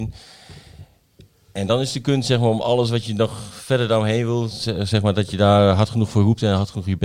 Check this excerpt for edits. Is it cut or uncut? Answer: uncut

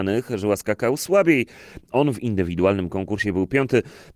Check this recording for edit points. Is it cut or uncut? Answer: cut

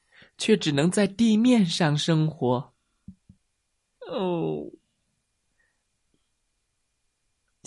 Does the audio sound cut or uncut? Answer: cut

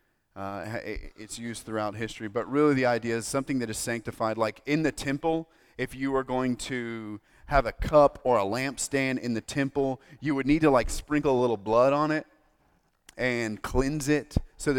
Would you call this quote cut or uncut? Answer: uncut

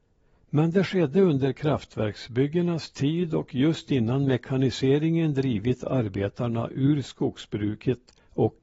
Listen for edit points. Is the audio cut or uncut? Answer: uncut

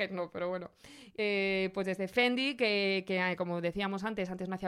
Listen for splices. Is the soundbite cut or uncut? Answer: cut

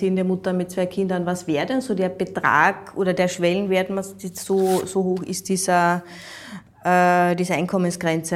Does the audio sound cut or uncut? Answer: uncut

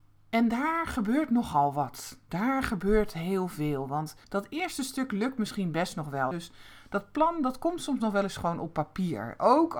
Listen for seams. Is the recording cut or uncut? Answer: cut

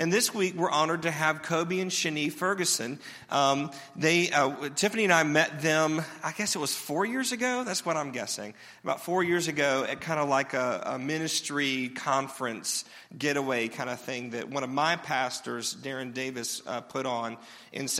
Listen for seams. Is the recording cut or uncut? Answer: uncut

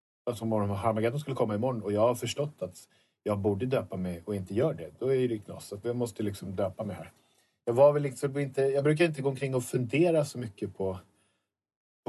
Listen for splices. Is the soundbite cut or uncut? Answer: cut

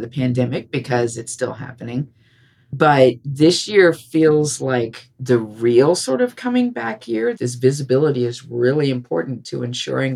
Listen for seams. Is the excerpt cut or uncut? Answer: cut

